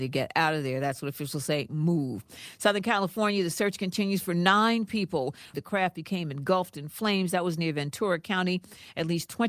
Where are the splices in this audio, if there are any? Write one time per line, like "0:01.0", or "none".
0:05.5